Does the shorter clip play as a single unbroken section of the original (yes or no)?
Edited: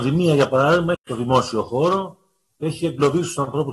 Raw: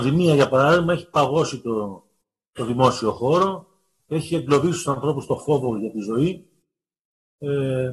no